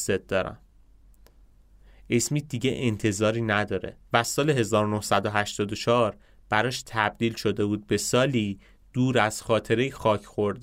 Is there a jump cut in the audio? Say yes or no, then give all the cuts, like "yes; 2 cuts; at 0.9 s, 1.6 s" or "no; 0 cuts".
yes; 1 cut; at 4.0 s